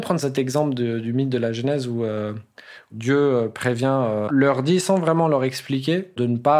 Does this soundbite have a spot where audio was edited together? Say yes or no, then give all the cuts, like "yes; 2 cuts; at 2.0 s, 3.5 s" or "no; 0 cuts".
yes; 1 cut; at 4.3 s